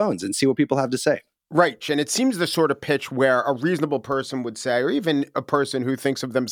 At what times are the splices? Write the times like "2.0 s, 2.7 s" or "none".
1.8 s

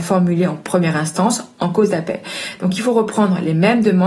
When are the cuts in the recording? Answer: none

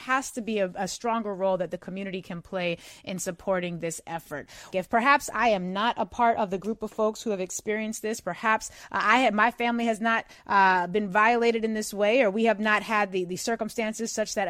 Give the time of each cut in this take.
4.7 s

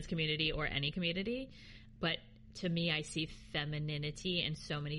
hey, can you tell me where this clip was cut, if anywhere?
2.0 s

